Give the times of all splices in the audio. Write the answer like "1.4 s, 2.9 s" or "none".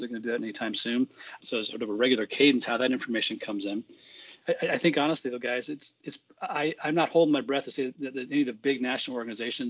1.4 s, 4.4 s